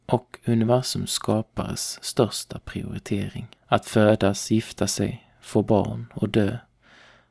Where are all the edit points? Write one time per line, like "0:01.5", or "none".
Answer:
0:03.5